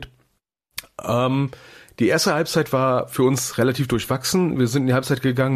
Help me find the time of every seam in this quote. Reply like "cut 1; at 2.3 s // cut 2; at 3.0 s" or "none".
none